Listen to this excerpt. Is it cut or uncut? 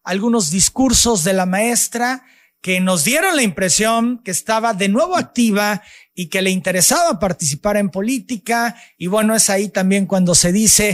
uncut